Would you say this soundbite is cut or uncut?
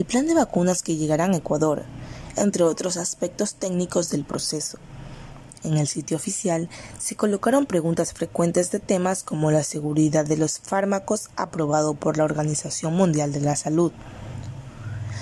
cut